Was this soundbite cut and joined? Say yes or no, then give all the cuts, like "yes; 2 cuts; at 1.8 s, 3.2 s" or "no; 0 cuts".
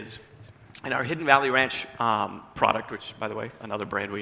no; 0 cuts